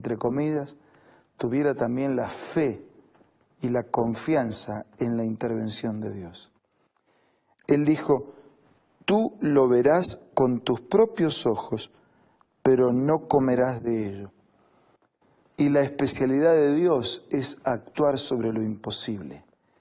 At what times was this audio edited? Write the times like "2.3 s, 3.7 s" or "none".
7.5 s, 15.5 s